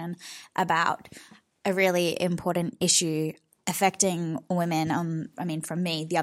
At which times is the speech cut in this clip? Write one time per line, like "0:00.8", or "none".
0:05.3